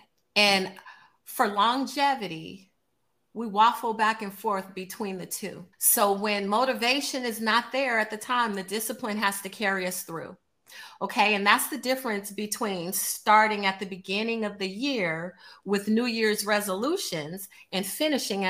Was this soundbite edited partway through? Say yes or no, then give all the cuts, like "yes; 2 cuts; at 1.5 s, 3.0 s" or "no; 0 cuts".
yes; 1 cut; at 5.7 s